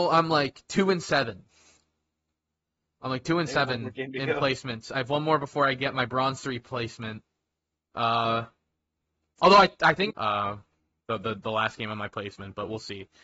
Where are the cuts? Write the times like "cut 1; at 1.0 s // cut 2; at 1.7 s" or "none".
cut 1; at 10.1 s